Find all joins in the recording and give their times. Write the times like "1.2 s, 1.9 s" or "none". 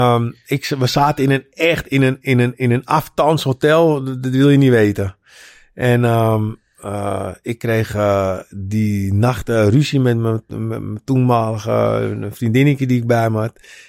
none